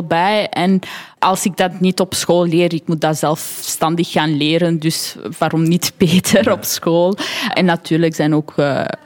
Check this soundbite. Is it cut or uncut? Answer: uncut